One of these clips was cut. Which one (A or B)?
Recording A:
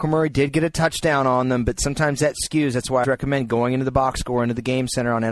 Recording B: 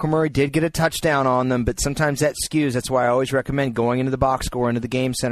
A